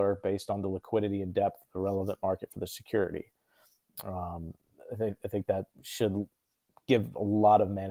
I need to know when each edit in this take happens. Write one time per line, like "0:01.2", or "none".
0:05.7